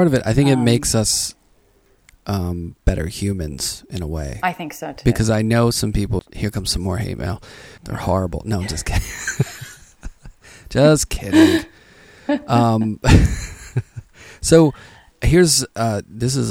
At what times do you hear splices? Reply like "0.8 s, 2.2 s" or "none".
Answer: 6.2 s, 7.8 s